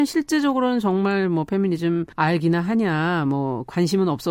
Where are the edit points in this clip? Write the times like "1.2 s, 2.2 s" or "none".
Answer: 2.1 s